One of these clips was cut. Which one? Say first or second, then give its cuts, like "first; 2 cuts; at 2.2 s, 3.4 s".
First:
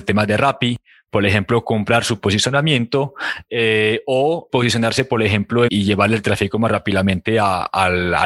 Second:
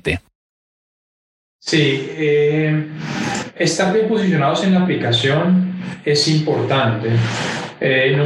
first; 2 cuts; at 4.5 s, 5.7 s